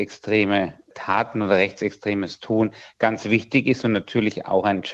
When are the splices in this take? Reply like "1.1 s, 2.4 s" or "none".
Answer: none